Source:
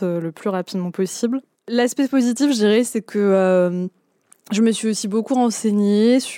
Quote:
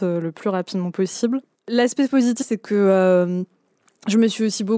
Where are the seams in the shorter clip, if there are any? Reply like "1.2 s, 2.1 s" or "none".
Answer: 2.4 s